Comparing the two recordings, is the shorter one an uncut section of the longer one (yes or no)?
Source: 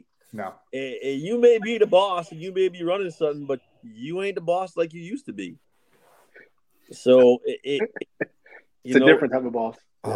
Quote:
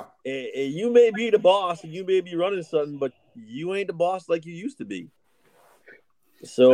yes